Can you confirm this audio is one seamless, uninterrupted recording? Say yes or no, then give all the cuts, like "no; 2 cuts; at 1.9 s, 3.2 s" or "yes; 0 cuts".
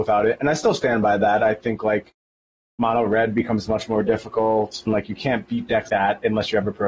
no; 2 cuts; at 4.9 s, 5.9 s